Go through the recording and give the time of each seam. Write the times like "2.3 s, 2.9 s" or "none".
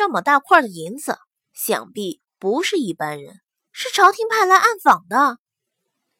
3.7 s